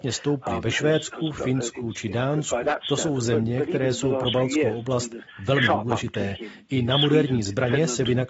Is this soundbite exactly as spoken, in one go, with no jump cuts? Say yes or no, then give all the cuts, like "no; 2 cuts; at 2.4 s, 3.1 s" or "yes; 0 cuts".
yes; 0 cuts